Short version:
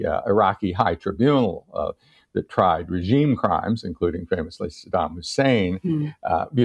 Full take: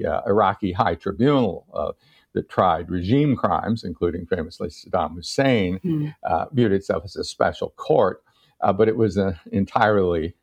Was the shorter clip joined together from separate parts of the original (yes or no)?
no